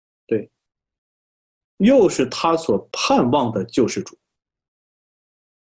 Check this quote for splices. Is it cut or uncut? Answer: cut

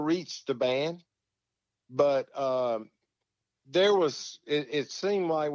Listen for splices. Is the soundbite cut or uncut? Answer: uncut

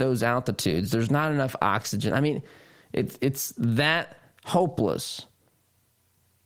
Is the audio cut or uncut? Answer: uncut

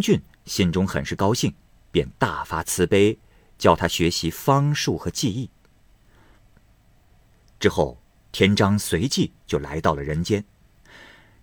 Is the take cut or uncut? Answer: cut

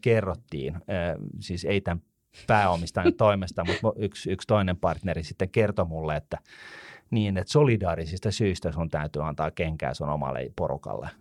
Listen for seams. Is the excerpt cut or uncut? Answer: uncut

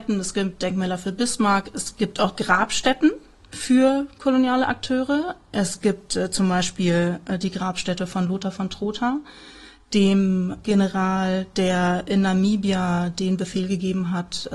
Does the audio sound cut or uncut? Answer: uncut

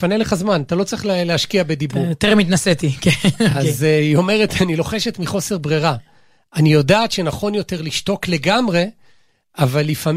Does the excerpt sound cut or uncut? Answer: uncut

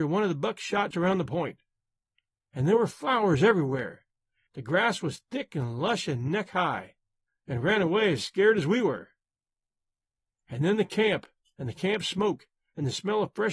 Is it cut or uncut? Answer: cut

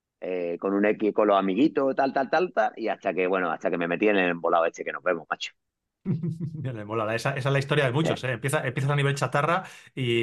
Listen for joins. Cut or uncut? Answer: uncut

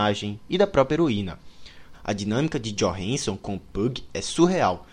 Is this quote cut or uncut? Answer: cut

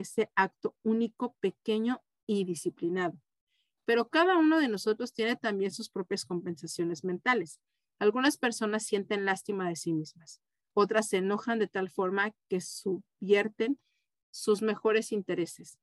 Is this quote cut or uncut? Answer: uncut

